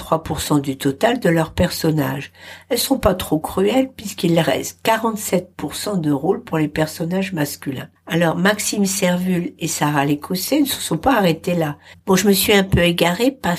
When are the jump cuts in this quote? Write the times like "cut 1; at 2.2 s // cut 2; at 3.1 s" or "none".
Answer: cut 1; at 8.0 s // cut 2; at 11.9 s